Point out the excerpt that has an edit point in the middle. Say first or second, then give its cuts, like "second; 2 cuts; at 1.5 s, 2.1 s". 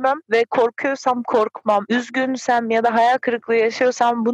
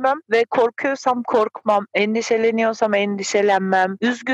first; 1 cut; at 1.9 s